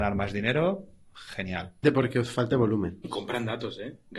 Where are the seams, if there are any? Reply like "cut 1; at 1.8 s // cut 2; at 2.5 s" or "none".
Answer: cut 1; at 1.8 s // cut 2; at 3.0 s